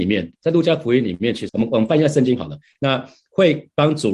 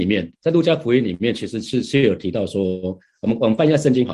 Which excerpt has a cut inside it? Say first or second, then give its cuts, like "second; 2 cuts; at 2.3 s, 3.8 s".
first; 2 cuts; at 1.5 s, 2.8 s